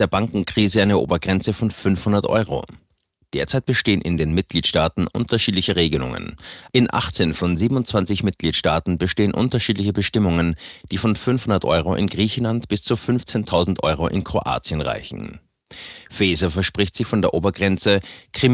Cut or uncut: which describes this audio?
cut